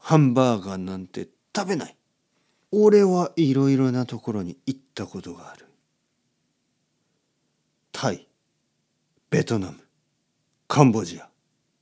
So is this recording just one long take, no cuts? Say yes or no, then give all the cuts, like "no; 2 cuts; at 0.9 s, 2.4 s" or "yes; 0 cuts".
no; 1 cut; at 2.7 s